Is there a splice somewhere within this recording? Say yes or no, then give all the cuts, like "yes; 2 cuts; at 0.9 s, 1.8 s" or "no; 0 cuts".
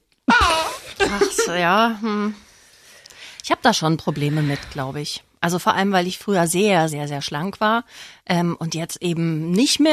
yes; 1 cut; at 6.9 s